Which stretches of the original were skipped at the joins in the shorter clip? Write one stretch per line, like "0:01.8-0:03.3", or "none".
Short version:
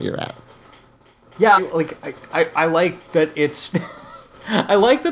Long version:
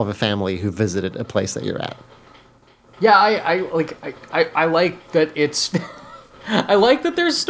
0:03.2-0:03.6